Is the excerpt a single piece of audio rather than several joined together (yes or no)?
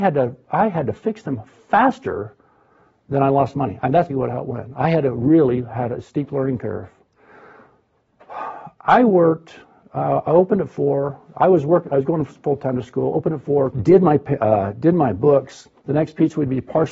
no